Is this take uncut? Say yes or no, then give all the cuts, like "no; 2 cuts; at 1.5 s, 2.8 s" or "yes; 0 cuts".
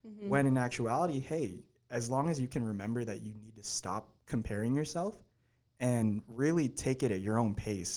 yes; 0 cuts